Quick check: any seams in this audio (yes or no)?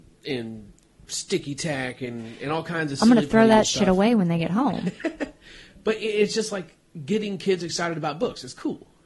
no